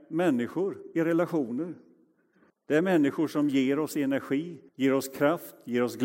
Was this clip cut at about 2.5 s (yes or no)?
yes